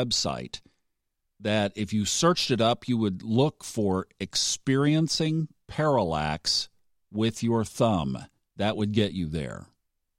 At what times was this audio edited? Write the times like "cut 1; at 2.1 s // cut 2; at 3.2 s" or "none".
cut 1; at 8.5 s